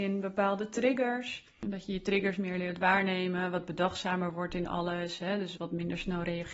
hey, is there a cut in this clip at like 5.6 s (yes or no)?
yes